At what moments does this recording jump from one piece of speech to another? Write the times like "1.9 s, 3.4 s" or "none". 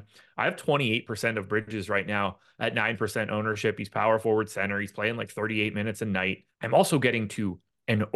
6.5 s